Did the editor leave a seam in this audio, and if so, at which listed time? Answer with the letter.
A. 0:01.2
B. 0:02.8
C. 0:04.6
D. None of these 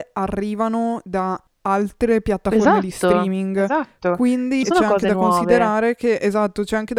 C